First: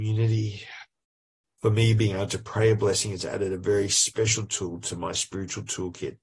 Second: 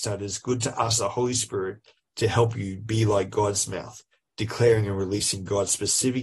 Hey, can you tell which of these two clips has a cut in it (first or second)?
first